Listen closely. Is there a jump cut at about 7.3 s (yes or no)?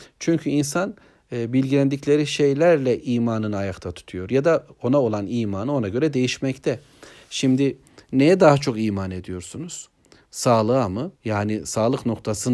no